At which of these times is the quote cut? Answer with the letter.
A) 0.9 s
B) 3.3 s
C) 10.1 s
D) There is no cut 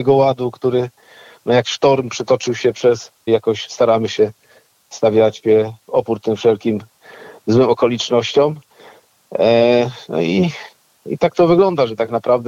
B